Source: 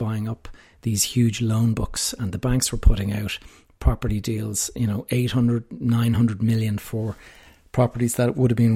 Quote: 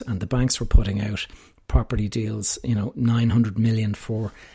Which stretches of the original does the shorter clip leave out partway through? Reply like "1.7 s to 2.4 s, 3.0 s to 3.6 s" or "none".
5.1 s to 5.8 s